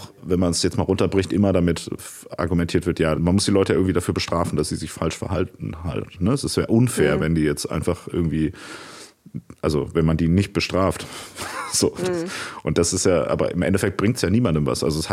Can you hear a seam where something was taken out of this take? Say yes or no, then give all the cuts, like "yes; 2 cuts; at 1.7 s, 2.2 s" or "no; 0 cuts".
yes; 1 cut; at 3.2 s